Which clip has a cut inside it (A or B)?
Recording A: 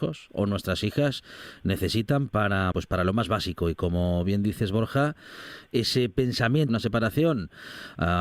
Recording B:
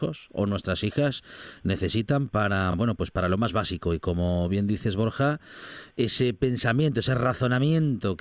A